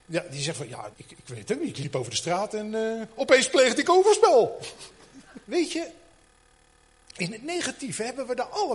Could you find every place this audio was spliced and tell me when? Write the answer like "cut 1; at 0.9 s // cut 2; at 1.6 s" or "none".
cut 1; at 0.9 s // cut 2; at 5.4 s